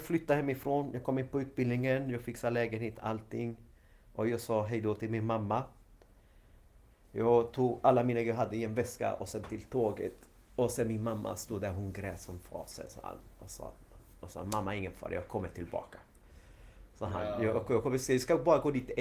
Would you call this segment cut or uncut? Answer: uncut